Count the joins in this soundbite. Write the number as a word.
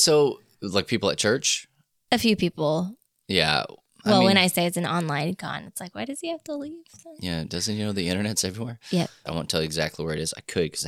one